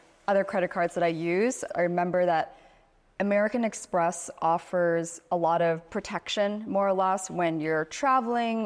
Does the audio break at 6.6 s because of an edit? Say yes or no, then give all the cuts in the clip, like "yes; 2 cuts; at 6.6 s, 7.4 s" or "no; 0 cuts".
no; 1 cut; at 1.7 s